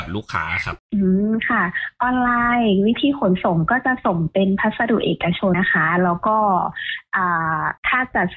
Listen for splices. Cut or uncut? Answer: cut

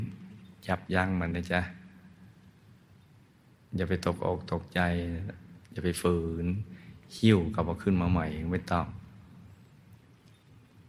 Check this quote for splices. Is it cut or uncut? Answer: cut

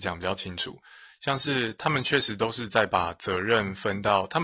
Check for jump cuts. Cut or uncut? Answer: uncut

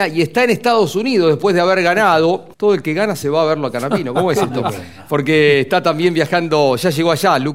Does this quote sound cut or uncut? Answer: cut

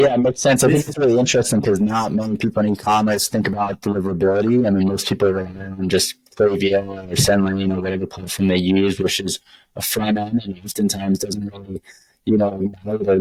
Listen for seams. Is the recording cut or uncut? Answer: uncut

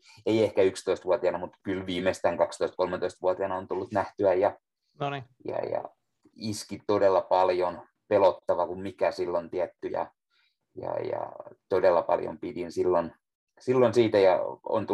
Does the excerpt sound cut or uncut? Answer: uncut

